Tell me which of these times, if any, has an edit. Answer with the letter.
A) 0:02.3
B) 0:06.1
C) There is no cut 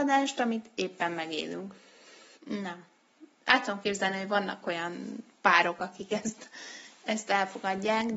A